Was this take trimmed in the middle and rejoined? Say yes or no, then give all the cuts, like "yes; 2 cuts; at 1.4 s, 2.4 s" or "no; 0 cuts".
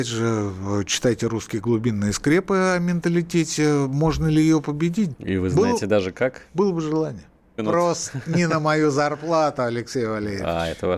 yes; 2 cuts; at 5.1 s, 7.6 s